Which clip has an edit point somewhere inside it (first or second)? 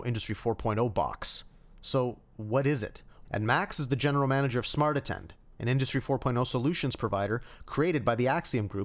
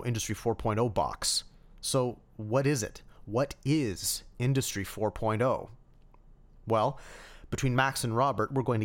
first